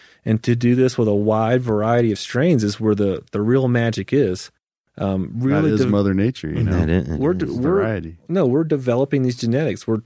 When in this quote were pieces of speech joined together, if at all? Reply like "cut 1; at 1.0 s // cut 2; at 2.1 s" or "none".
none